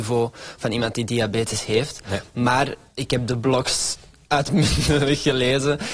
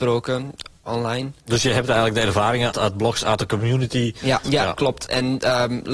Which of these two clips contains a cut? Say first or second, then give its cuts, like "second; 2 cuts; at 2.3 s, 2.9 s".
second; 2 cuts; at 2.7 s, 4.4 s